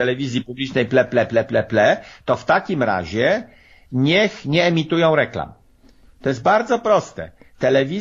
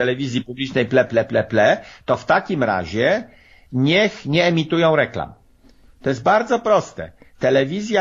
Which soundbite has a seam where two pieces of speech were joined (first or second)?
second